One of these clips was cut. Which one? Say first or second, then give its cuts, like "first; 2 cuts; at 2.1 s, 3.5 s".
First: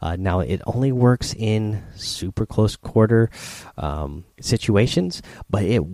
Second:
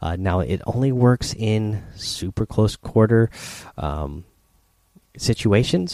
first; 1 cut; at 4.3 s